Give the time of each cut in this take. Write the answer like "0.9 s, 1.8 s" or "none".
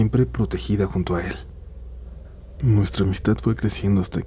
2.6 s